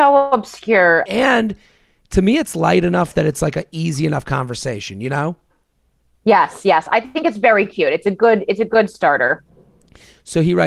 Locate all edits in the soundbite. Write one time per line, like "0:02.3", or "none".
0:01.1